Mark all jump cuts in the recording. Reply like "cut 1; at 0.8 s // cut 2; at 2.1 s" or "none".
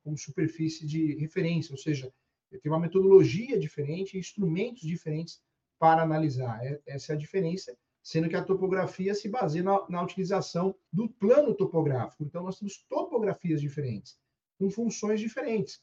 cut 1; at 7.8 s // cut 2; at 10.8 s // cut 3; at 12.2 s